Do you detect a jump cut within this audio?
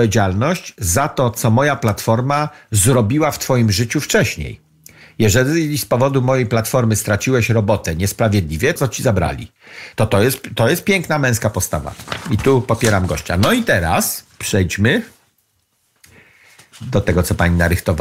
yes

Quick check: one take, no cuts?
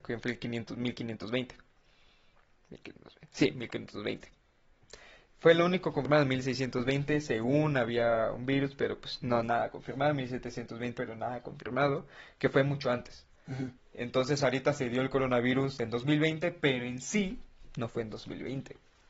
no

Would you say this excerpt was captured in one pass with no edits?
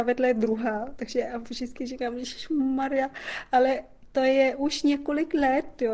yes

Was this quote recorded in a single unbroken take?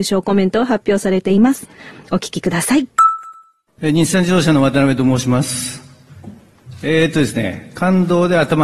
yes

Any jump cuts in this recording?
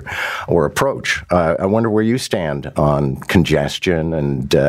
no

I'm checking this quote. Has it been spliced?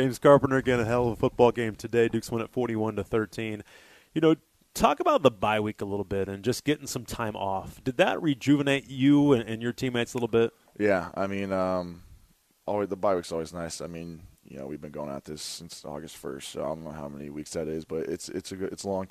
no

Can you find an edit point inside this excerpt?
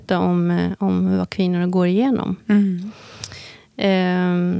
no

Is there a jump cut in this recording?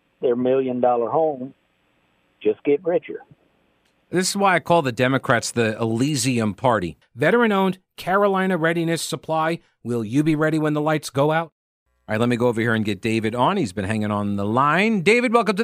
yes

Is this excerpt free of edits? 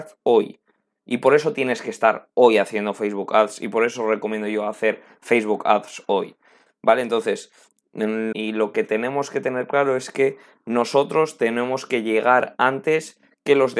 no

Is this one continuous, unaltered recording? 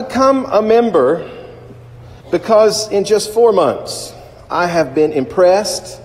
no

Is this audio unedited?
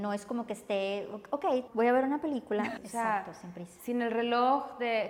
no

